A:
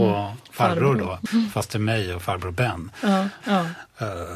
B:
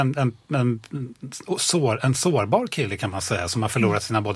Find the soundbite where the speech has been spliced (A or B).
A